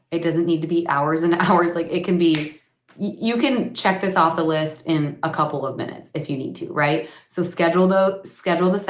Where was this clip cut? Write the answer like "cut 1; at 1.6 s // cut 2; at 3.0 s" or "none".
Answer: none